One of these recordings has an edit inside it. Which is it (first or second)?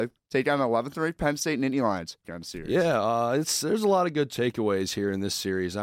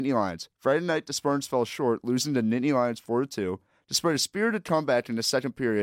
first